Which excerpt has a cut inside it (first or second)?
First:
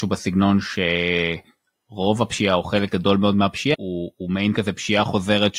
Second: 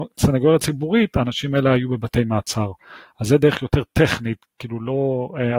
first